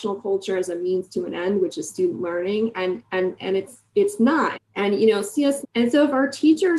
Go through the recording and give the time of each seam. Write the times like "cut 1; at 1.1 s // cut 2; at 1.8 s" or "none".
cut 1; at 4.5 s // cut 2; at 5.6 s